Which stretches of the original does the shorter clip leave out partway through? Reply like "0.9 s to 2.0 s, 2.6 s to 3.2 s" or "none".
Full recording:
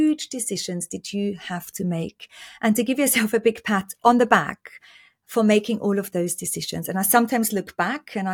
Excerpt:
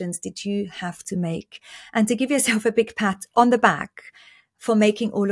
none